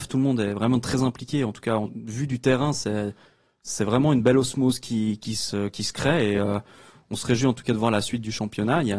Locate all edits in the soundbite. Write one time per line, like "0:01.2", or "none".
none